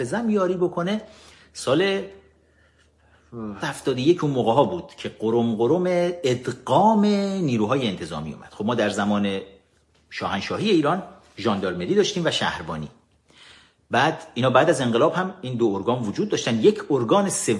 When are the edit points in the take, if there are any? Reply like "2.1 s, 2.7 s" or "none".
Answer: 3.6 s